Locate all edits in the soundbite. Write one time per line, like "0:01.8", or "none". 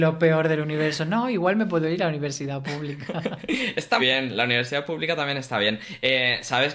0:04.0